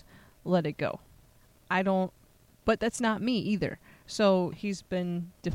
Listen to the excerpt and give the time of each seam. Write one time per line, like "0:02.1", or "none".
0:04.5

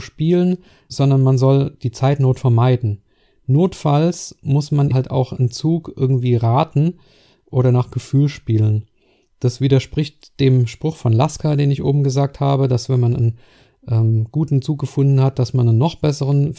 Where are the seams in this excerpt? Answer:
0:04.9

